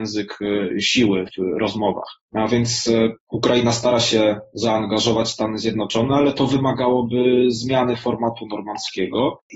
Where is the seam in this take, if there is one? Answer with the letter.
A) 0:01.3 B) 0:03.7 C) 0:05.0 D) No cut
A